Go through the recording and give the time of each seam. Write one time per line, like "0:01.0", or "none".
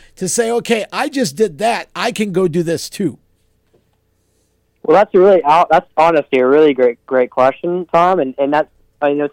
none